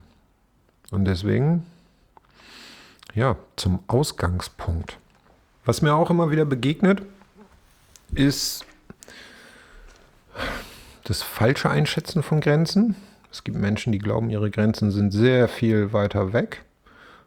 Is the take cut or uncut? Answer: uncut